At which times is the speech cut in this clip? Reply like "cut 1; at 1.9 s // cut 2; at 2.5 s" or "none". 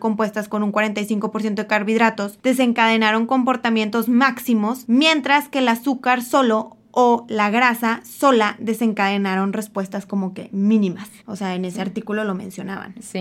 cut 1; at 11.2 s